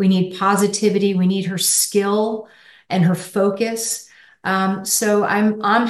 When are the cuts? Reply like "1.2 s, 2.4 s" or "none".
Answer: none